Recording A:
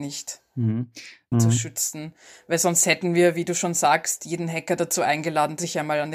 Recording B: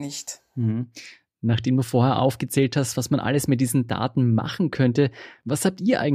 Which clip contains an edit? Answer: A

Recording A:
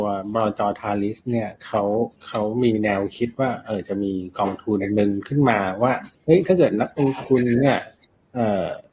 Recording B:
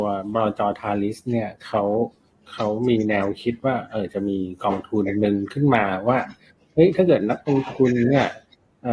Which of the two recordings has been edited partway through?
A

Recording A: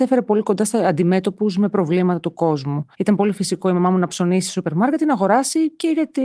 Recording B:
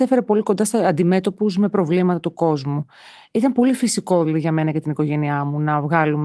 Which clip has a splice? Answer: A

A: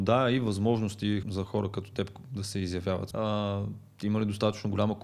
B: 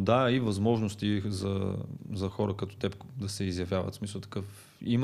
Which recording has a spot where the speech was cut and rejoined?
A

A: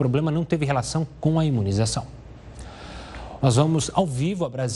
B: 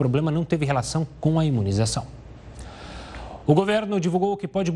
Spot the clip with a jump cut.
A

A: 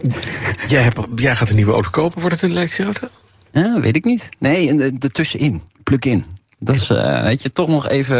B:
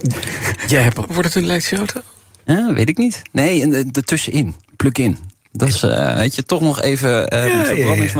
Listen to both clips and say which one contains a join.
B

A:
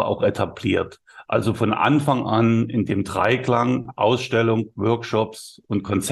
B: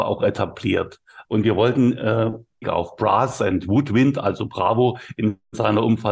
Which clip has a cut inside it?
B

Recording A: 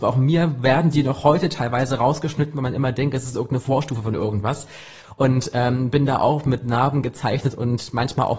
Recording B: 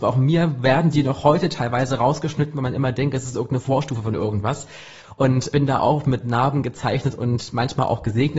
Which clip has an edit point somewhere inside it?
B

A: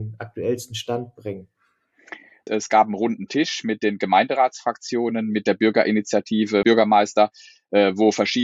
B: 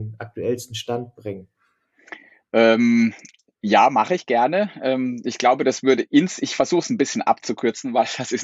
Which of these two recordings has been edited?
A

